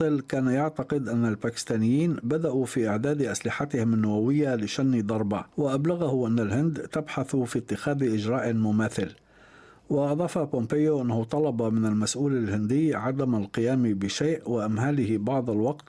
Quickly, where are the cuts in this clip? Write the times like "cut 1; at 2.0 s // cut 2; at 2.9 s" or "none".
cut 1; at 5.5 s